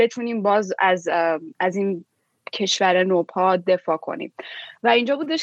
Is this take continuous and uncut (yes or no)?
no